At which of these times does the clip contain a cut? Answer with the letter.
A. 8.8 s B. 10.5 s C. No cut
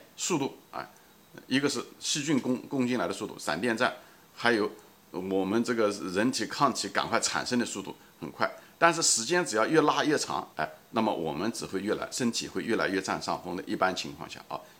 B